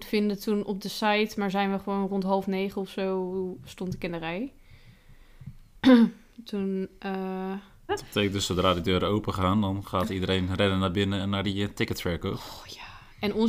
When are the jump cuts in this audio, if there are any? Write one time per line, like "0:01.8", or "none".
0:07.9